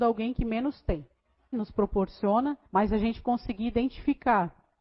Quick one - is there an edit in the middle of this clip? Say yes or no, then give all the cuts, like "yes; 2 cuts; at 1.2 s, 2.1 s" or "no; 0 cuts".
yes; 2 cuts; at 1.5 s, 2.7 s